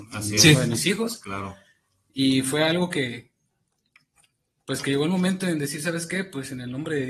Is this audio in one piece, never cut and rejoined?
yes; 0 cuts

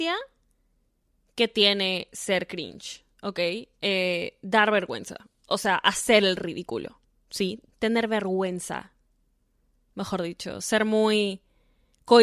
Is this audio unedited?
no; 1 cut; at 7.7 s

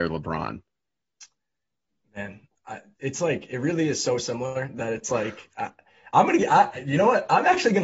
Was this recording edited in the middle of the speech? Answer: no; 0 cuts

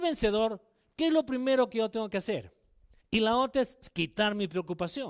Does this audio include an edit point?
yes; 1 cut; at 3.0 s

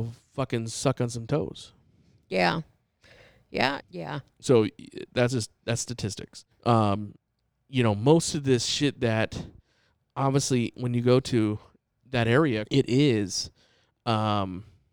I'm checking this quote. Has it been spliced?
yes; 3 cuts; at 3.8 s, 6.5 s, 12.7 s

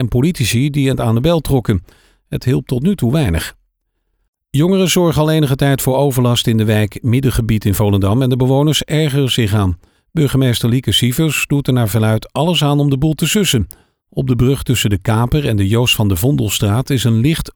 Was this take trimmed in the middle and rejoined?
no; 0 cuts

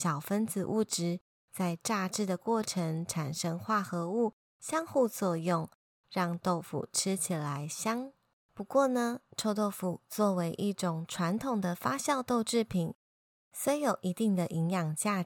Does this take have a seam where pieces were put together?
no; 0 cuts

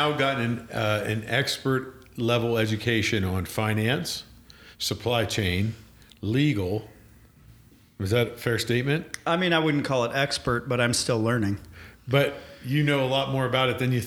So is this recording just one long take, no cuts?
yes; 0 cuts

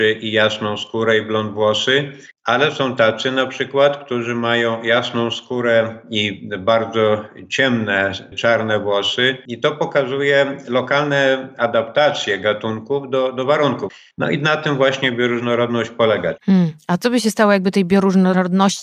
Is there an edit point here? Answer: no; 0 cuts

